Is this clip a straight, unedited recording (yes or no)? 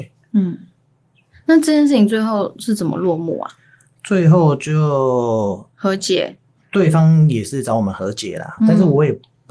no